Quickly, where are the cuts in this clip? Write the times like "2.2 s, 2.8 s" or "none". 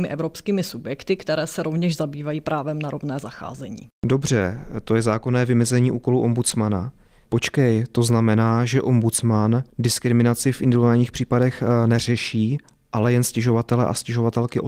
7.3 s